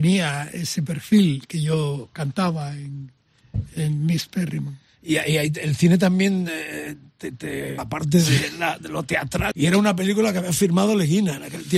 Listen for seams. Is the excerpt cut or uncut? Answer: cut